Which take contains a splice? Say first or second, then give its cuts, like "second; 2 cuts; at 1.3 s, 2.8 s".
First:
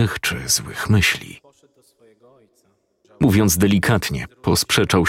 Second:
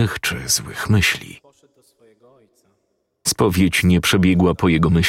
first; 1 cut; at 3.0 s